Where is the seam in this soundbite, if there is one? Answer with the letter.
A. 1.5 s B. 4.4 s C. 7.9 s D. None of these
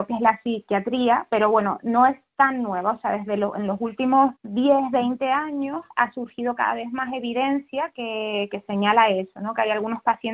B